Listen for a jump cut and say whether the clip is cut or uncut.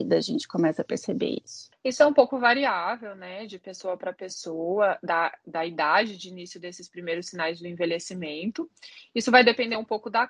uncut